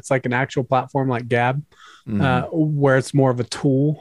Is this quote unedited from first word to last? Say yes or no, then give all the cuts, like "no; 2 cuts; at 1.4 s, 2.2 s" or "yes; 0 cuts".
yes; 0 cuts